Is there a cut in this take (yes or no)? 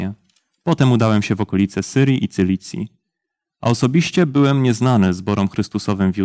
no